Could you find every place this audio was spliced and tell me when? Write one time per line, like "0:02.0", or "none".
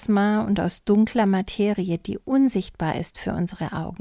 none